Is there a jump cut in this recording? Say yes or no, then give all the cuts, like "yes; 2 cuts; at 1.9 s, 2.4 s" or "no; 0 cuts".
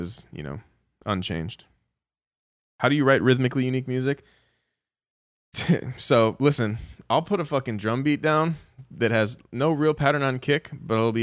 no; 0 cuts